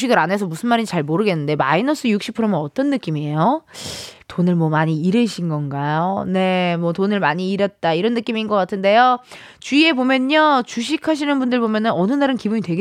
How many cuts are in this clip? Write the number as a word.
zero